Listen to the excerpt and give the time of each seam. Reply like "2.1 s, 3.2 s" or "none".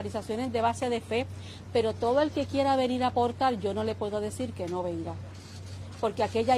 none